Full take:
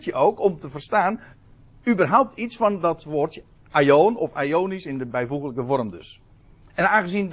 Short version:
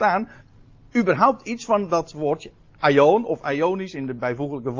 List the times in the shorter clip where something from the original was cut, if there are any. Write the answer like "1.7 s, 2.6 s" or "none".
none